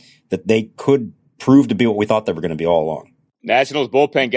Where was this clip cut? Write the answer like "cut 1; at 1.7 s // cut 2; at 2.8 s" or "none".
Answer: none